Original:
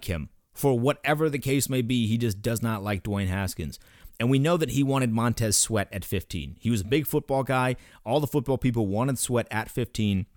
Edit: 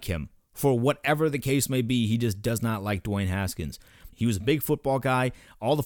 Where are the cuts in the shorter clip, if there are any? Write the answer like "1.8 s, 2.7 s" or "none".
4.1 s